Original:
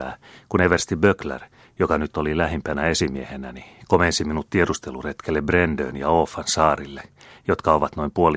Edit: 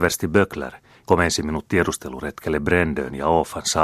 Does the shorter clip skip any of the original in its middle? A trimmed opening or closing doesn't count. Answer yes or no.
yes